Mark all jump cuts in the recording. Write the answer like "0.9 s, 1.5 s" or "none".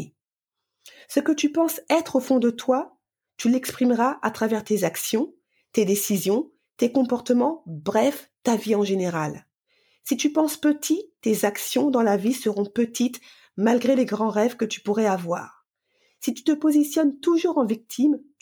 none